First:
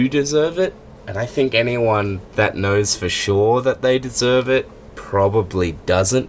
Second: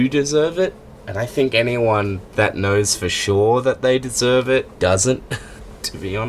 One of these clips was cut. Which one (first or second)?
second